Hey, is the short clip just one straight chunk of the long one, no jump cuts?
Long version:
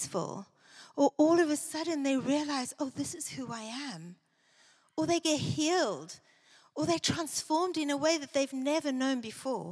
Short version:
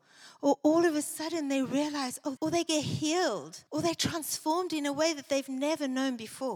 no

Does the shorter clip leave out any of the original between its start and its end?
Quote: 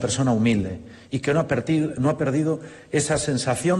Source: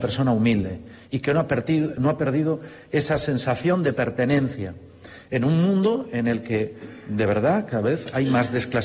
no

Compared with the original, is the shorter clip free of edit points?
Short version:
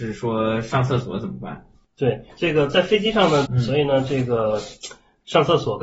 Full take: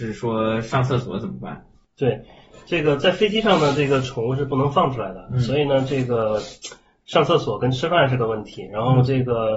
no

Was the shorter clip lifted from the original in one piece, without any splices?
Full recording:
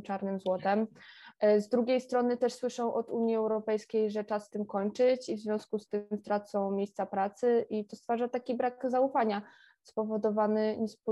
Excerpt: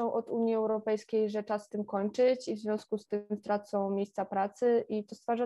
yes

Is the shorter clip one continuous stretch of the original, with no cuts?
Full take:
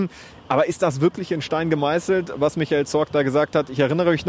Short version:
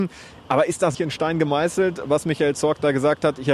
no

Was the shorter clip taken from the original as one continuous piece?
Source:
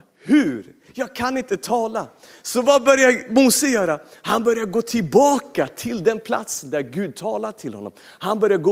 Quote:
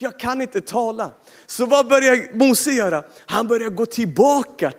yes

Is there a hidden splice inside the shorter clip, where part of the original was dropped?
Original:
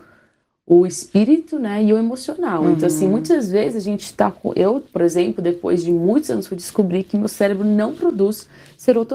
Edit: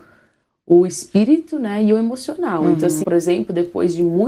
yes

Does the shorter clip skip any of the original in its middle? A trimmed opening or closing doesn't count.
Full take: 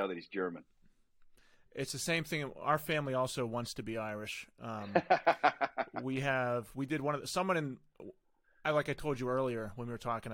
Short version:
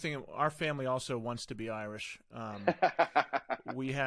no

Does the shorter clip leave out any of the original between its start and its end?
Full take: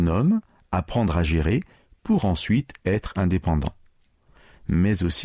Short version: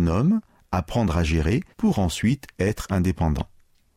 yes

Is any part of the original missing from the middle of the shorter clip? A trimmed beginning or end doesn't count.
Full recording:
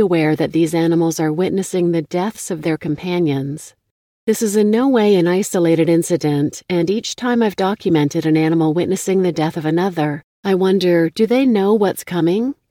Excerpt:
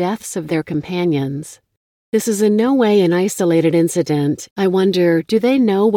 yes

